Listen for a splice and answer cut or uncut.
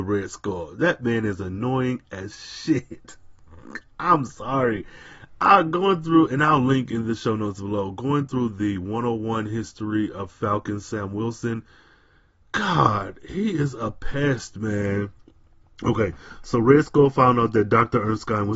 uncut